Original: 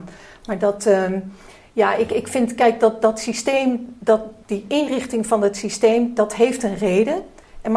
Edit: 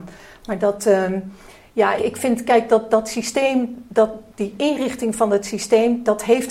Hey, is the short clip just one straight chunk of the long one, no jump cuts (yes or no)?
no